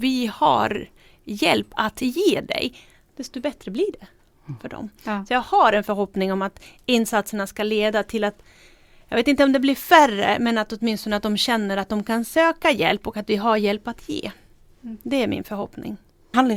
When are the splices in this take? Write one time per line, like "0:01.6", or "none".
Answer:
none